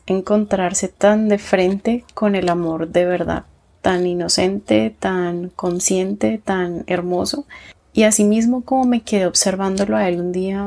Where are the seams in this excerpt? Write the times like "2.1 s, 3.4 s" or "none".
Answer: none